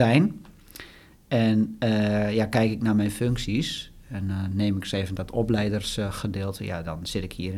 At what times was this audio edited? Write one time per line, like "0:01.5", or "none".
none